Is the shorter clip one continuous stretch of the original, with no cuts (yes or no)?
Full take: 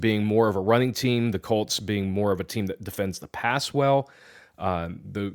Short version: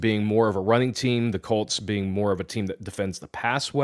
yes